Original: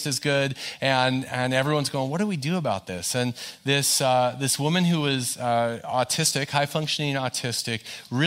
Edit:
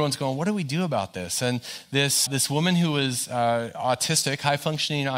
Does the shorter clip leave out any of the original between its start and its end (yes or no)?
yes